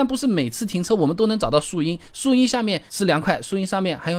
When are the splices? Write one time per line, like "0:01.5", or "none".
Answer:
0:02.9